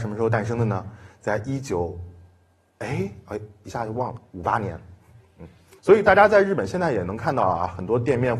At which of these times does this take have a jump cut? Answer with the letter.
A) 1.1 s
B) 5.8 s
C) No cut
B